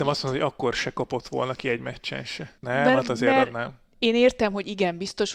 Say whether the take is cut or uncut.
cut